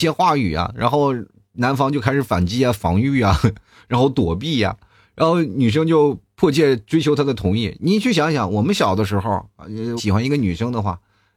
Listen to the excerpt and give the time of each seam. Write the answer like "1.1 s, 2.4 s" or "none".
10.0 s